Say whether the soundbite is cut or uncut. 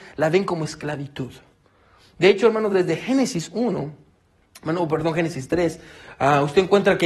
uncut